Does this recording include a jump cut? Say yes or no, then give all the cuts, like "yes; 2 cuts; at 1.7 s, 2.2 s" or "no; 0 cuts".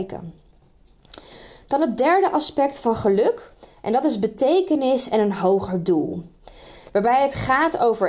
yes; 1 cut; at 6.9 s